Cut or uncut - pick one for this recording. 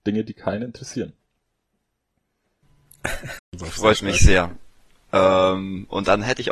cut